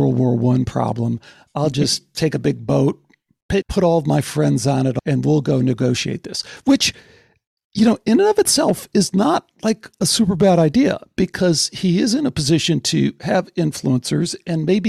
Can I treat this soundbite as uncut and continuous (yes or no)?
yes